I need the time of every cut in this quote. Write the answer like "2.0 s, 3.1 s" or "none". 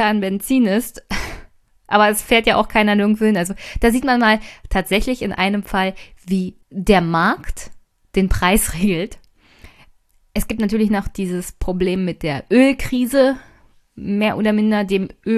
6.6 s